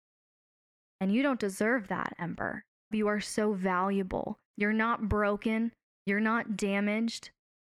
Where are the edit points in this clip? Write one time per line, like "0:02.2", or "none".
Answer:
0:02.9
0:04.5